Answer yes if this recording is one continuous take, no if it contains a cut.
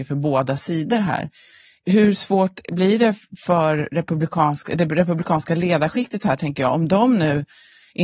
yes